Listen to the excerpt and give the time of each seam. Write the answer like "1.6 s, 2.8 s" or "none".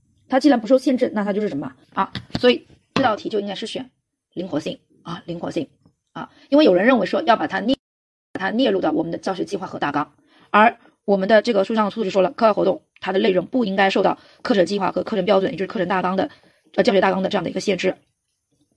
1.8 s